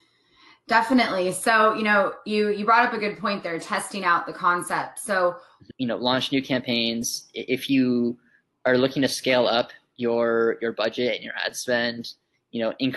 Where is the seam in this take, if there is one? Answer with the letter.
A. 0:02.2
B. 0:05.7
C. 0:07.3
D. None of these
B